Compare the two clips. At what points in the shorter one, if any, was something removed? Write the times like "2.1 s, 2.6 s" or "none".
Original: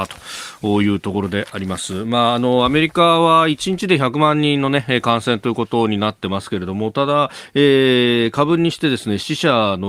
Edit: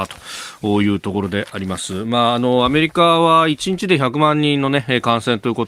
none